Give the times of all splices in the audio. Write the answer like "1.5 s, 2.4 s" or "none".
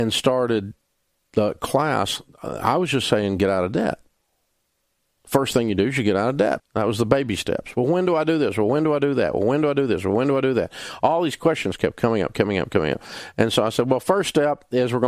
6.6 s